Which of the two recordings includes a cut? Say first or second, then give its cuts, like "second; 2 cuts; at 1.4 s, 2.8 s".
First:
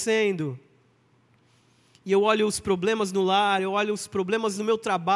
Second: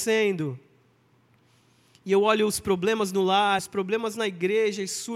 second; 1 cut; at 3.6 s